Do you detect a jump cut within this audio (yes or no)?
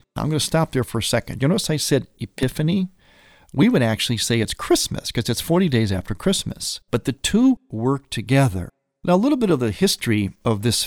yes